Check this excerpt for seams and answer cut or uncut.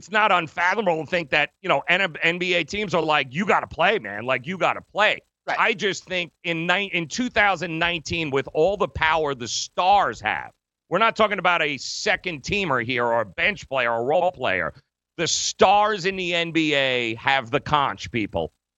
uncut